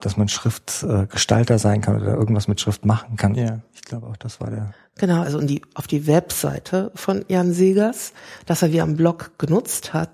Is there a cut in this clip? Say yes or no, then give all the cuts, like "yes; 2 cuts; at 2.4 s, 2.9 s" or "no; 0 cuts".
yes; 2 cuts; at 3.3 s, 5.2 s